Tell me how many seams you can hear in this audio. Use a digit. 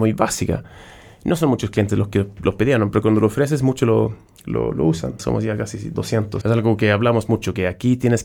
2